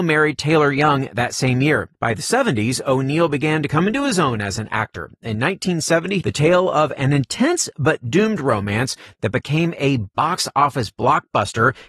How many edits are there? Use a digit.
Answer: 2